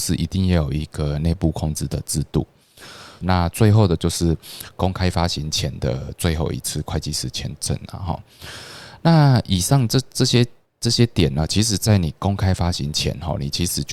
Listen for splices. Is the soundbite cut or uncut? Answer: cut